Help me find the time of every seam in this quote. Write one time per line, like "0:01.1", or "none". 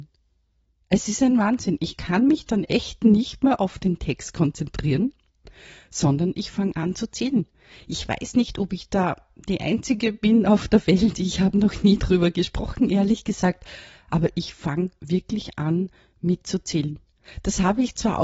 none